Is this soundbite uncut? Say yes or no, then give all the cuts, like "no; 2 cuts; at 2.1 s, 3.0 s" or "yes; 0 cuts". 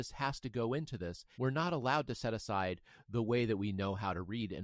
no; 1 cut; at 1.3 s